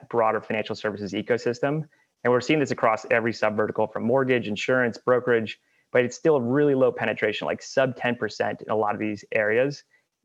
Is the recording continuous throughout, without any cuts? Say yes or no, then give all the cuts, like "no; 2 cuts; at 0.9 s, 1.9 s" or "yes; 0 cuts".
yes; 0 cuts